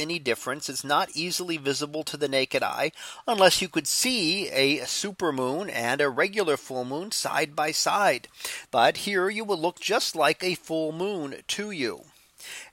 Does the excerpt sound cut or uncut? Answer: cut